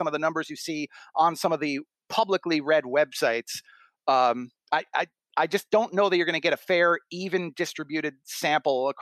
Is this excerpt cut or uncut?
uncut